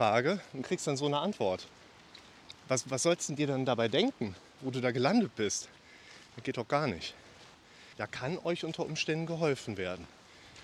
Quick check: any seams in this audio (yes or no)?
yes